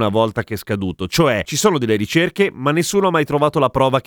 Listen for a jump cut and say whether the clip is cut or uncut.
uncut